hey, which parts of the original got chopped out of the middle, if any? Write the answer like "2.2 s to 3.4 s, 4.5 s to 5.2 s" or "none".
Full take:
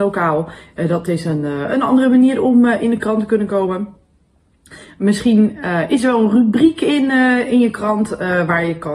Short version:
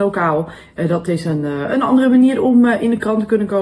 none

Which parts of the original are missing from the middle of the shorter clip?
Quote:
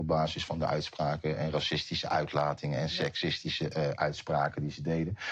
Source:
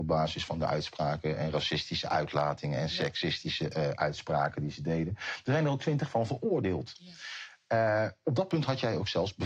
none

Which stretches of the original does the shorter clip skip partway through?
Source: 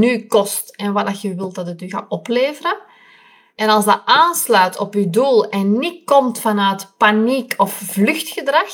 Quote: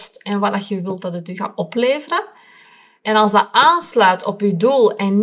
none

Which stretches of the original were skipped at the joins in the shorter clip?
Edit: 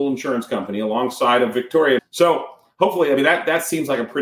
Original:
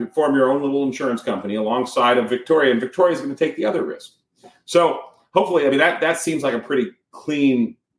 2.7 s to 4.5 s

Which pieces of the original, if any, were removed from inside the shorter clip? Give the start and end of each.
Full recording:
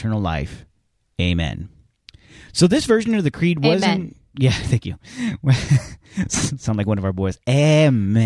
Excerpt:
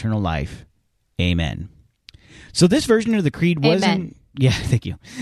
none

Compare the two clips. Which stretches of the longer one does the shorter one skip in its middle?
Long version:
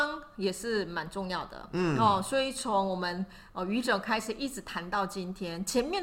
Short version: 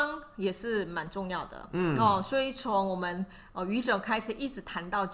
none

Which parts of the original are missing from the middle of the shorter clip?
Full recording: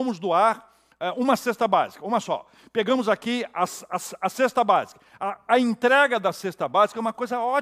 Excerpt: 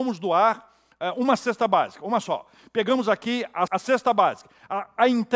3.7 s to 4.2 s

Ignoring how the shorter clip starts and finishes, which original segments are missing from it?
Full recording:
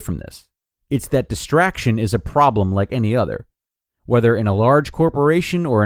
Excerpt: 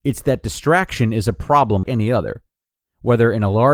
2.7 s to 2.9 s

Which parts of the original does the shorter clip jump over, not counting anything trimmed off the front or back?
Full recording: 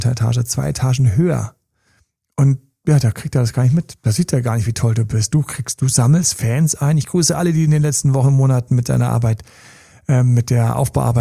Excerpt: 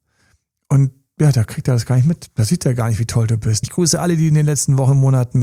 5.3 s to 7.0 s

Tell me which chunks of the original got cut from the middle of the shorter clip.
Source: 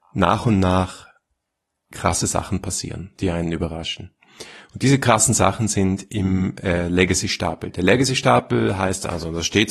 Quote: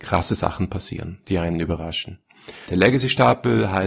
4.6 s to 7.7 s

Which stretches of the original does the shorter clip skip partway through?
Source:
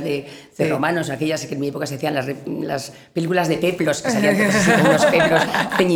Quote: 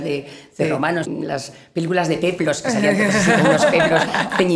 1.0 s to 2.4 s

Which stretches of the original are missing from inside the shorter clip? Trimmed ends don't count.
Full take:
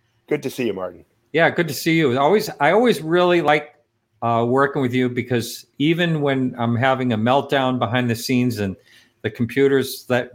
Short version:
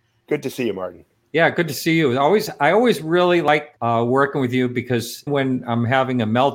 3.8 s to 4.2 s, 5.7 s to 6.2 s

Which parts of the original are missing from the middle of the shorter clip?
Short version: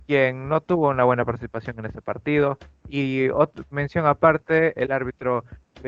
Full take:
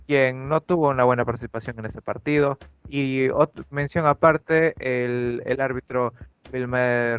4.7 s to 5.4 s

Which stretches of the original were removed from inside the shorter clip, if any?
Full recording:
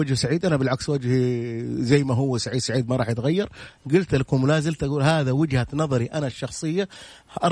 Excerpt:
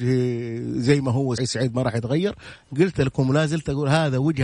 2.4 s to 2.5 s

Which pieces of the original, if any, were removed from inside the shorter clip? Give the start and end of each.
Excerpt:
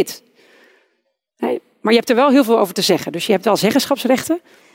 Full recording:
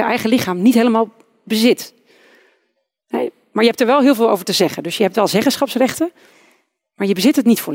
none

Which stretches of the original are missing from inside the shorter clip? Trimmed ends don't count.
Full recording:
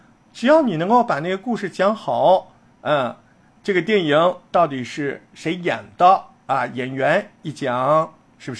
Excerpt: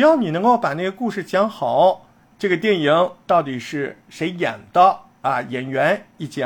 2.6 s to 3.4 s

